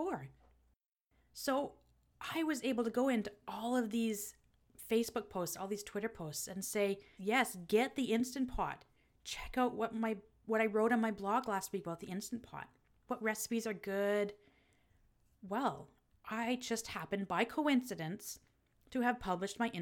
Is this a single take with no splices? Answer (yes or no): no